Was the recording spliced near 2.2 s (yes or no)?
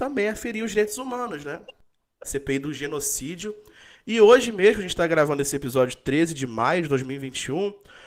yes